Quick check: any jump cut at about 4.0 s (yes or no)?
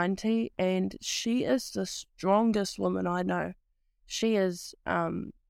no